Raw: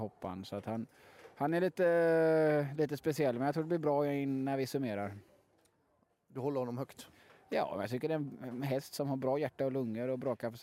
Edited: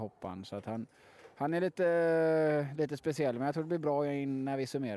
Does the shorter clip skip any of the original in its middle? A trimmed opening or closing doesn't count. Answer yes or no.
no